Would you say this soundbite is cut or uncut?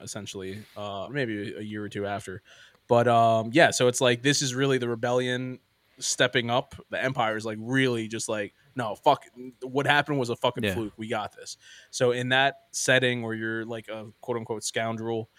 cut